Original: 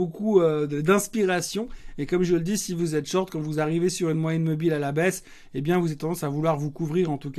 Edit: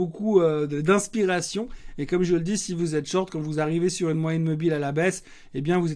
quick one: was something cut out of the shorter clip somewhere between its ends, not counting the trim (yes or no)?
no